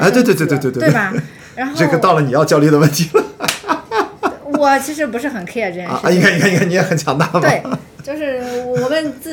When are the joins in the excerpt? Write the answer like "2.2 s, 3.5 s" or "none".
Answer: none